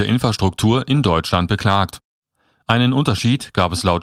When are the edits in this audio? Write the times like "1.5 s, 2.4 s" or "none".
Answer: none